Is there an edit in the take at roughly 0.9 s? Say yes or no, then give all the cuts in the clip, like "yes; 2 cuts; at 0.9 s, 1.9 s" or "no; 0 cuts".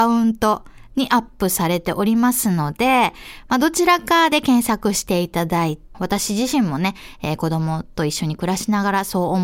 no; 1 cut; at 5.9 s